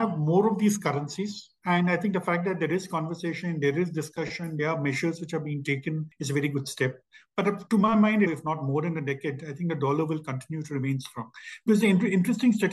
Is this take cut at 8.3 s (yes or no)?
yes